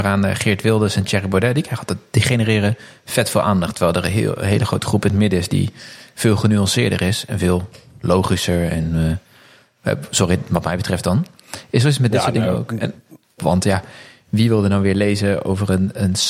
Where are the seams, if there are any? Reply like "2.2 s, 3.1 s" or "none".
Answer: 13.4 s